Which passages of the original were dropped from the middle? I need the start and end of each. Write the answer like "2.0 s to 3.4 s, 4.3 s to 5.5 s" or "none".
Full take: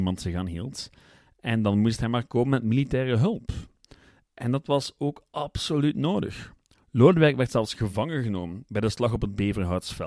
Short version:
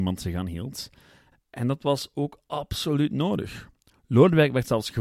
1.3 s to 4.2 s